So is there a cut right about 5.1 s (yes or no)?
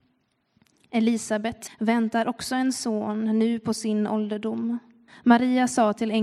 yes